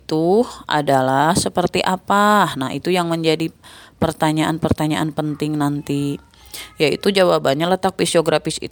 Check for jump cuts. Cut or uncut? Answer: uncut